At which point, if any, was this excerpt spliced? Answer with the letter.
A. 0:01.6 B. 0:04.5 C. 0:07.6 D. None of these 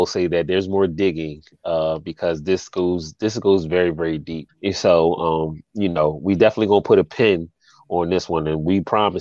B